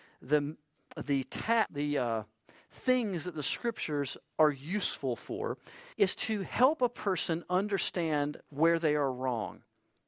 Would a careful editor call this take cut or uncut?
cut